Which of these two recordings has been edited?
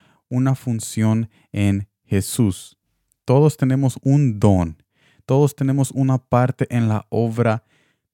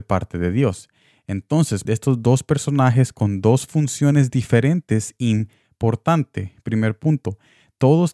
second; 1 cut; at 1.8 s

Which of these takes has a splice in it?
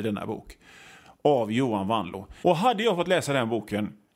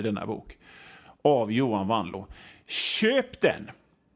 first; 1 cut; at 2.4 s

